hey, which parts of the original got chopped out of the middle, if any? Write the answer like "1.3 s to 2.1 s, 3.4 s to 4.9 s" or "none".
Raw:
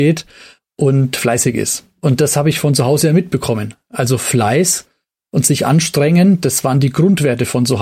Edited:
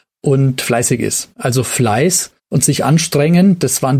1.9 s to 3.9 s, 4.9 s to 5.2 s

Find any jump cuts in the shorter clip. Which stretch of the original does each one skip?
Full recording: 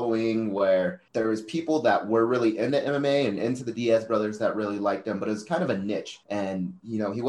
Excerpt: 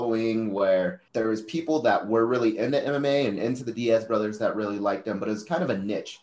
none

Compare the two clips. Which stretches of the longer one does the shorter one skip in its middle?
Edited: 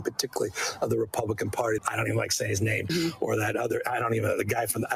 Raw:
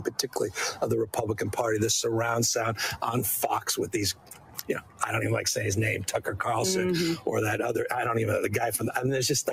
1.8 s to 4.9 s, 6.1 s to 6.9 s

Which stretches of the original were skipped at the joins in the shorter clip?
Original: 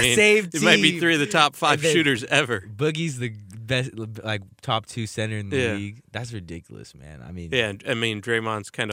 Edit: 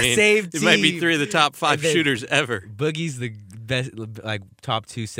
none

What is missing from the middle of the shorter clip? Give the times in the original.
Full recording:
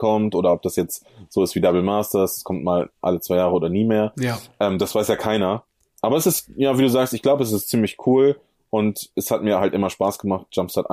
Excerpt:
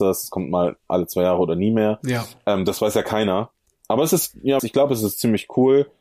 6.7 s to 7.1 s

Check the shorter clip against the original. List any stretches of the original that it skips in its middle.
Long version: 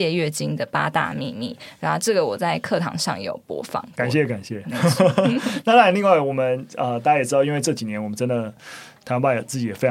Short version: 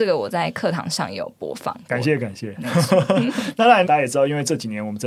5.9 s to 7.0 s

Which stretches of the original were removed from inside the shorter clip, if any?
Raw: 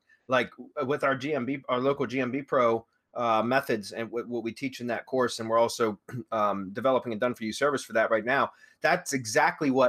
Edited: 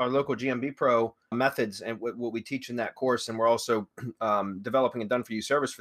3.0 s to 3.4 s

